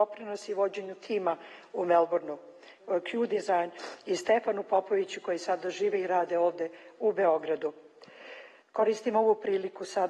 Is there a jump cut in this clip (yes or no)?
yes